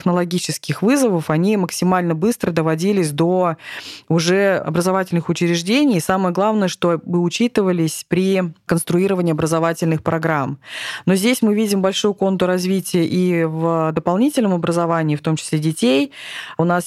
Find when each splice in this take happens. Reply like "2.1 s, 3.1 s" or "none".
none